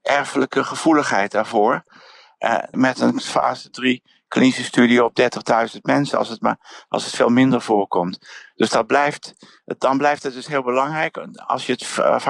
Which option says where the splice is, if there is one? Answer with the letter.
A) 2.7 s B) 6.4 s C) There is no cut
A